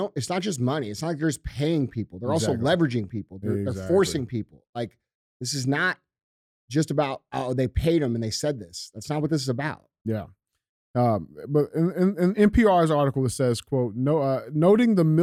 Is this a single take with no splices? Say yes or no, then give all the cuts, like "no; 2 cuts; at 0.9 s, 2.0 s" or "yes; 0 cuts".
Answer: yes; 0 cuts